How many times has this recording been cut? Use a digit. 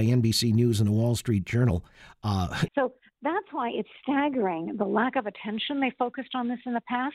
1